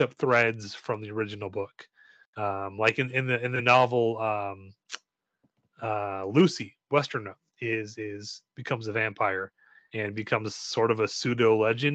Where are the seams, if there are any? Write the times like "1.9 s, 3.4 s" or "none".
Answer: none